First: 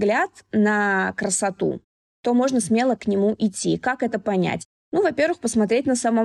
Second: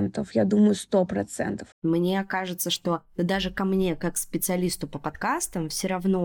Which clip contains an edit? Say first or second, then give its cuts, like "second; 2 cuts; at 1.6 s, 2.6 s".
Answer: second; 1 cut; at 1.7 s